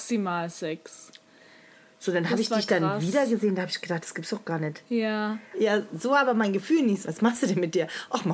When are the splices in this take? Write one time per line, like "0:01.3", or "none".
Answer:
0:05.5
0:07.0